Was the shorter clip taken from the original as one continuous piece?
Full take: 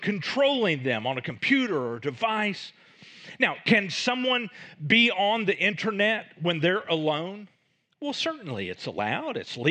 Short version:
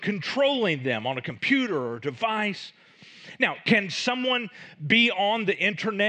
yes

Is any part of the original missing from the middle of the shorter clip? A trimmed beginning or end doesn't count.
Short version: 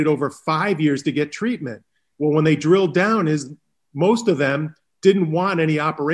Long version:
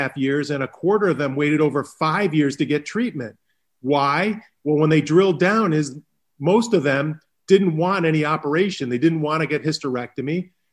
yes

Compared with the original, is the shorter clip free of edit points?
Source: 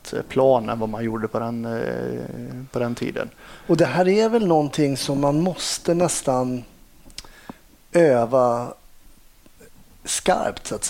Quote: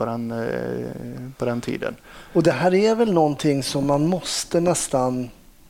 yes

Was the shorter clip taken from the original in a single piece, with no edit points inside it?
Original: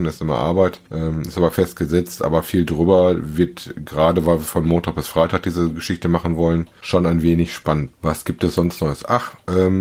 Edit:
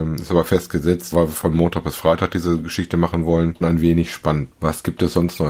no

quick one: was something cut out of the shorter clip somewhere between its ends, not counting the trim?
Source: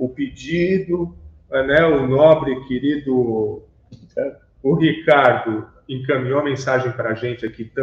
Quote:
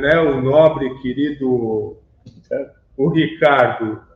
no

